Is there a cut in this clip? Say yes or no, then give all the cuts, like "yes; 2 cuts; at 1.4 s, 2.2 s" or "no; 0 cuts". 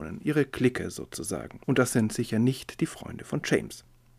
yes; 1 cut; at 1.6 s